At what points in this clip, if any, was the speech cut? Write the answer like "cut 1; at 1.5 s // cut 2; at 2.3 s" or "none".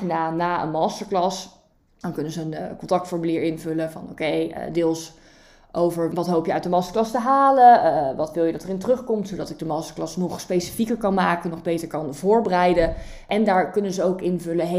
none